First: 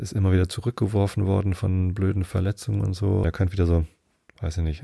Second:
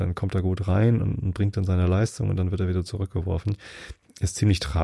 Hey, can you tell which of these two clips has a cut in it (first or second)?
first